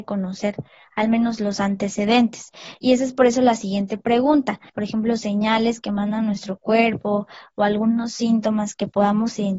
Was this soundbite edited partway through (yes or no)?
yes